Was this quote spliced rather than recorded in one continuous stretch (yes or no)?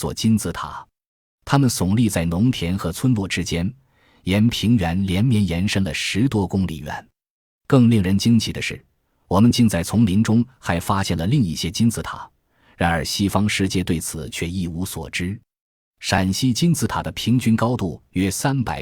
no